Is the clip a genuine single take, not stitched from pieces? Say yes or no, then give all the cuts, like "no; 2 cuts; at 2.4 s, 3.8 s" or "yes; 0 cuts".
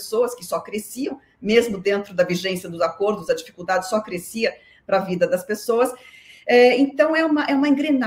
yes; 0 cuts